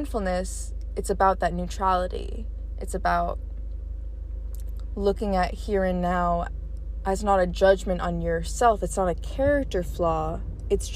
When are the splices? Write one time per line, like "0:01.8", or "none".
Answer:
none